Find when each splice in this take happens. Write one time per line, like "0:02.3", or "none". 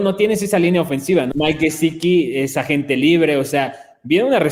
0:01.3